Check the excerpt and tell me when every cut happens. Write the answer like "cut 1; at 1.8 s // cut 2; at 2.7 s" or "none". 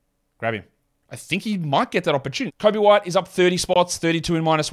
cut 1; at 1.0 s // cut 2; at 2.5 s

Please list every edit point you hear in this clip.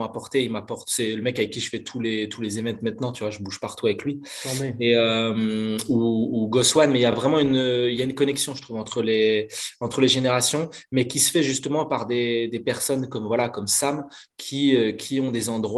none

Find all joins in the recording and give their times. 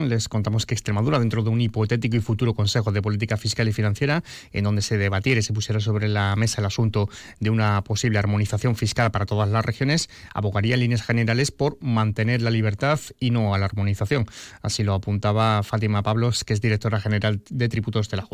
none

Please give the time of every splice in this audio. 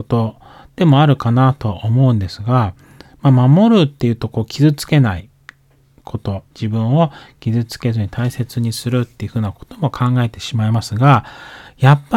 cut 1; at 6.5 s

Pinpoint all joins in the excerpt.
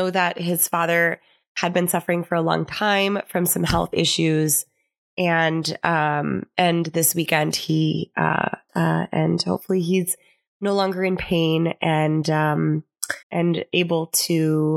cut 1; at 8.7 s // cut 2; at 13.2 s

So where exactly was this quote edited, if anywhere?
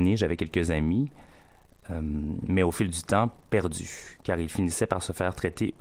none

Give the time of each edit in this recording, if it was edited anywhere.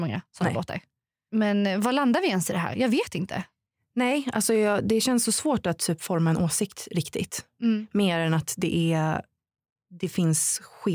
none

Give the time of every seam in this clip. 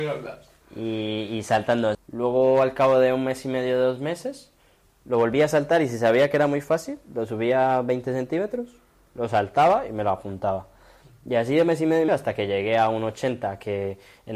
cut 1; at 1.9 s // cut 2; at 12.1 s

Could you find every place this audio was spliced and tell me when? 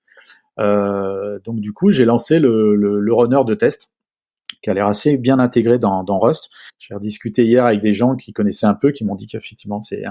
cut 1; at 6.7 s

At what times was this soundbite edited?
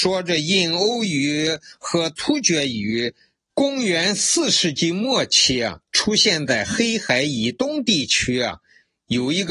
cut 1; at 3.5 s

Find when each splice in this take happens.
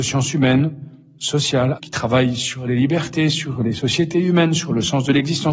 cut 1; at 1.8 s

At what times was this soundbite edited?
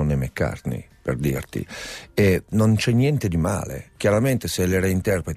cut 1; at 2.5 s

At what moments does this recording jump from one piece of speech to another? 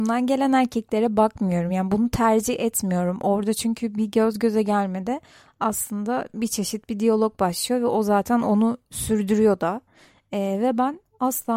none

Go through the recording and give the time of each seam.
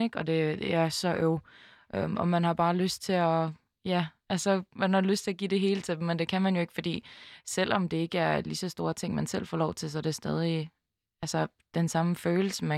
none

